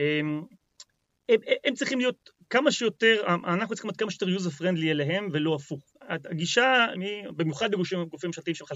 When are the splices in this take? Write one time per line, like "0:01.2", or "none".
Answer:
0:05.9
0:06.9

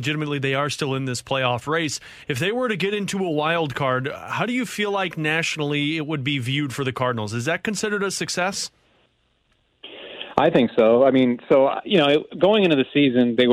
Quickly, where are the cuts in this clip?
none

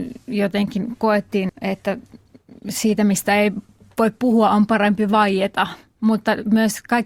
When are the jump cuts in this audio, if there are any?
0:01.5

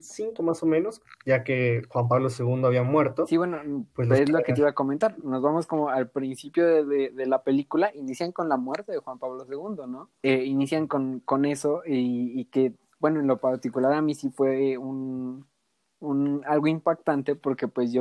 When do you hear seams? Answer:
0:10.2

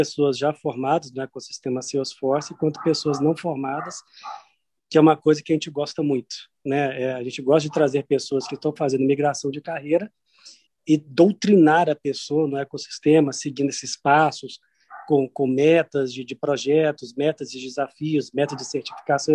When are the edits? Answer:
0:10.7

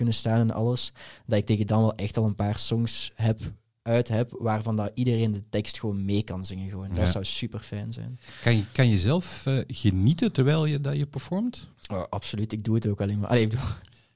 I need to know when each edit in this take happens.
none

